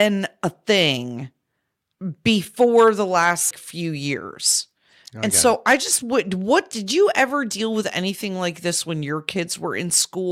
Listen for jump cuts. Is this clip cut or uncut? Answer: cut